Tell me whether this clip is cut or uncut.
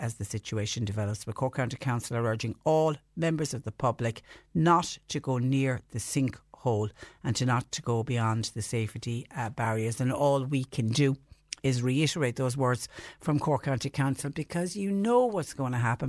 uncut